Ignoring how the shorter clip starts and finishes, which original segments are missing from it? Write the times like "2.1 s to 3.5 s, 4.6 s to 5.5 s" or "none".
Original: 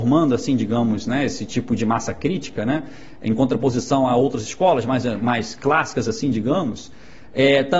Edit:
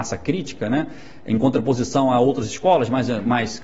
none